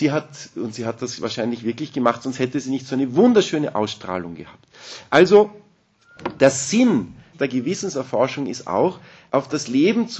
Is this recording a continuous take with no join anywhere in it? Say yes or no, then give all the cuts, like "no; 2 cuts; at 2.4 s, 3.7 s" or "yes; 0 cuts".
no; 2 cuts; at 7.3 s, 9.3 s